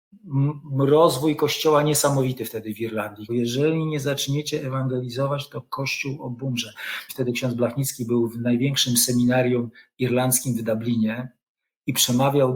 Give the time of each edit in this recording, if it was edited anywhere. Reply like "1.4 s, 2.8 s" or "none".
3.3 s, 7.1 s